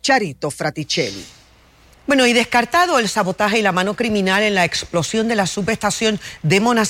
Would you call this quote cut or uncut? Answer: uncut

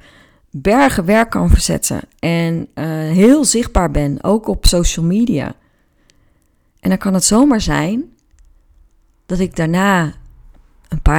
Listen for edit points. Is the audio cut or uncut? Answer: uncut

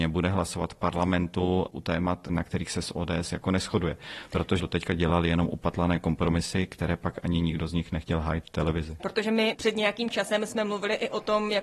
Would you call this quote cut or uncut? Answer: cut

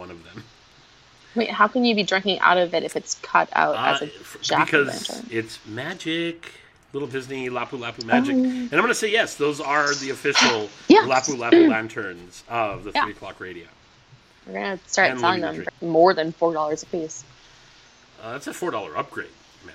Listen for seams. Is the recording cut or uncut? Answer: cut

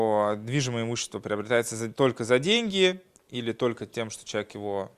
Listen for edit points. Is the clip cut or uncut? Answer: uncut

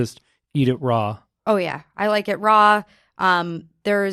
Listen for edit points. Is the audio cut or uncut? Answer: uncut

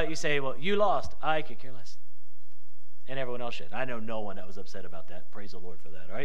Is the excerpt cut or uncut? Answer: uncut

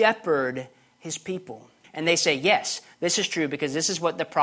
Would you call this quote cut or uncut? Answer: cut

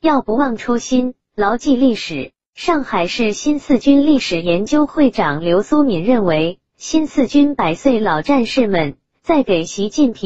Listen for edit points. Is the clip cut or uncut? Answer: cut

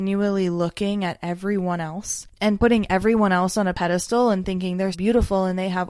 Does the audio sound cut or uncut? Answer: cut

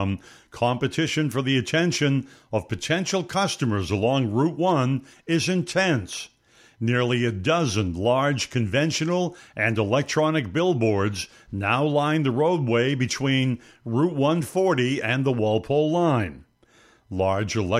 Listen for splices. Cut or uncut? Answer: uncut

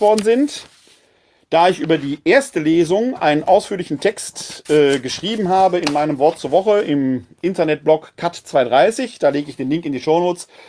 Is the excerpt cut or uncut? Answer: uncut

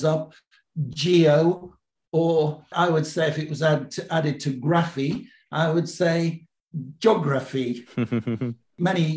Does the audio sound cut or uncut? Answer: uncut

